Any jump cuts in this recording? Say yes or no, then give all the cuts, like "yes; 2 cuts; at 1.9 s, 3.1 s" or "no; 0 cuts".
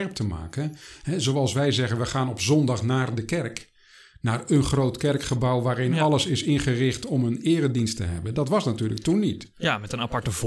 no; 0 cuts